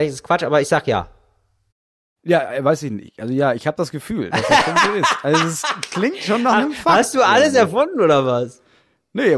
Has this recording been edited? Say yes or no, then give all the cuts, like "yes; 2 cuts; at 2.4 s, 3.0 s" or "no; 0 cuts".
no; 0 cuts